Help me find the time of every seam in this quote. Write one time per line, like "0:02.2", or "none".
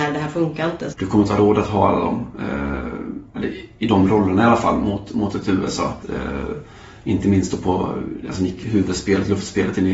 0:00.9
0:06.0